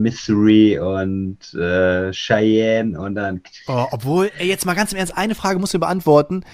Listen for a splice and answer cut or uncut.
uncut